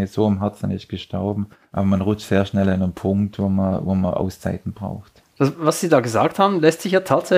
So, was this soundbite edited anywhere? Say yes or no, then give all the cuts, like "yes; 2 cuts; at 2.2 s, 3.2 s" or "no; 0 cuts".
yes; 2 cuts; at 1.6 s, 5.2 s